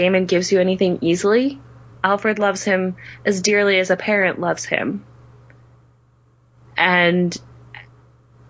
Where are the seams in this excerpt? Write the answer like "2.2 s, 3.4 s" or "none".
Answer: 1.9 s